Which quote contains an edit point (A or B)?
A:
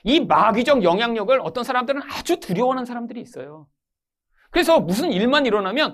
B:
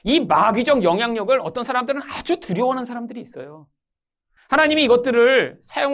B